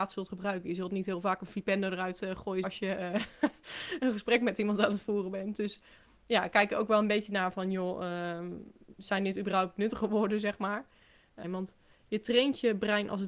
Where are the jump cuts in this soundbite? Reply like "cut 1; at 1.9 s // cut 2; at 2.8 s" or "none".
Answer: cut 1; at 2.6 s // cut 2; at 11.4 s